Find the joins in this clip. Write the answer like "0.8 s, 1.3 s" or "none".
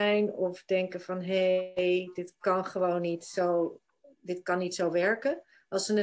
none